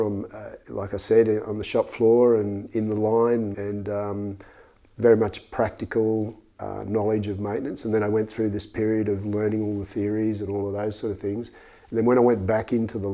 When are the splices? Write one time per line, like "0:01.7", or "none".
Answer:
0:03.5